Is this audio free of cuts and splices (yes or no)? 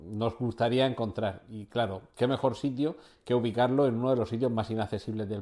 yes